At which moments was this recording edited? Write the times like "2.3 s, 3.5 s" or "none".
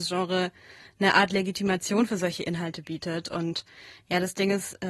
none